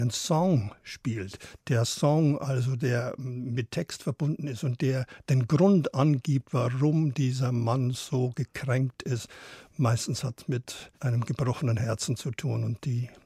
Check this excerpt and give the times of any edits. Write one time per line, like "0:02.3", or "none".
0:10.9